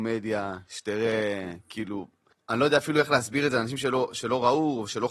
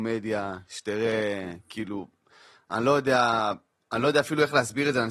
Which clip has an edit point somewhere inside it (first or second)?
first